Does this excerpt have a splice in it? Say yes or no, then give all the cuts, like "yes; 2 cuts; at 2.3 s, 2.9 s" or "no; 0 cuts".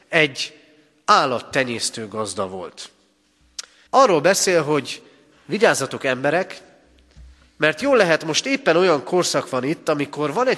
yes; 1 cut; at 3.9 s